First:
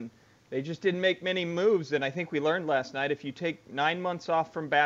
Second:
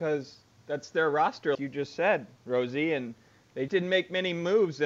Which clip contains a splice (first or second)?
second